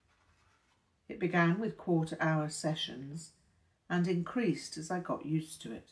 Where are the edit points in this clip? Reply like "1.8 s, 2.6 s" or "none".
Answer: 0.9 s